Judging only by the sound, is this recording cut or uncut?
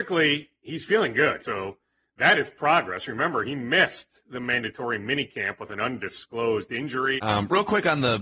cut